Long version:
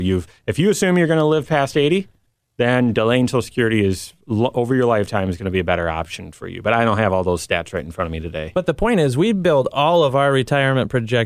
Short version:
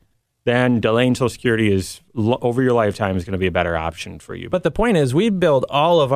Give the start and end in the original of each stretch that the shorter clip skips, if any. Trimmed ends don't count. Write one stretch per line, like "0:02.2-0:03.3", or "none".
0:06.6-0:08.5